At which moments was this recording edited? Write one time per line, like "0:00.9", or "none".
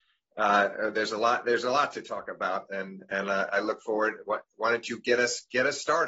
none

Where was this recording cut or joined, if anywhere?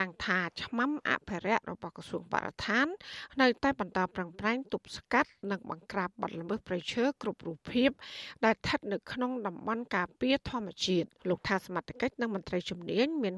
0:11.2

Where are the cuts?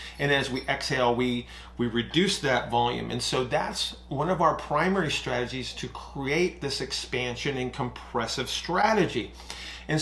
none

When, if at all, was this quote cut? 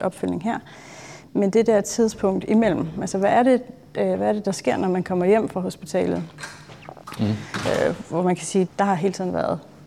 0:07.2
0:08.7

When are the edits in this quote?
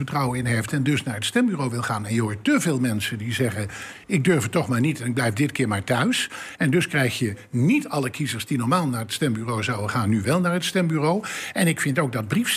none

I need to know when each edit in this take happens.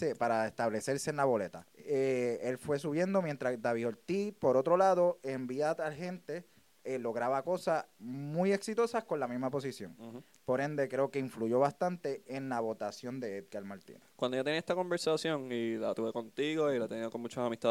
0:01.7

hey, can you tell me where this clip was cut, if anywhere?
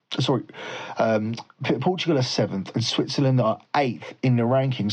none

